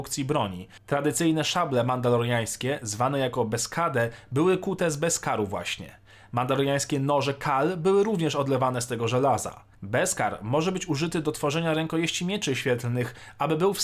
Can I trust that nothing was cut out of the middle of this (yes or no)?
yes